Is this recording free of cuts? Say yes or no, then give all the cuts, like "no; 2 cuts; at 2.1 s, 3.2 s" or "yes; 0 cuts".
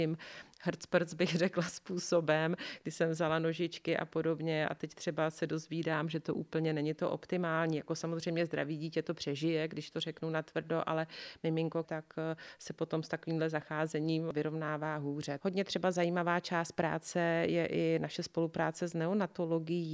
no; 2 cuts; at 11.8 s, 15.4 s